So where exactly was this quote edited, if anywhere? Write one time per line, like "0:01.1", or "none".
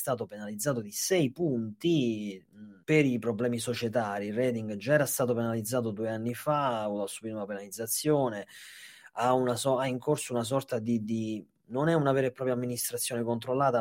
0:02.8